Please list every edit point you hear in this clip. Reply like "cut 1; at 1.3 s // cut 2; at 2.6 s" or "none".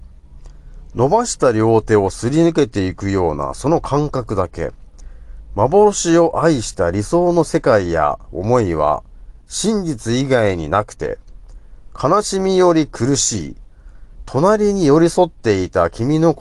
cut 1; at 14.2 s

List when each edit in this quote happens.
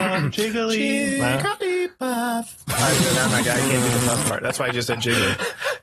none

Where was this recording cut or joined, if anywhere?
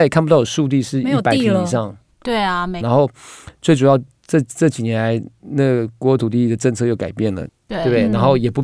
cut 1; at 2.8 s // cut 2; at 7.5 s

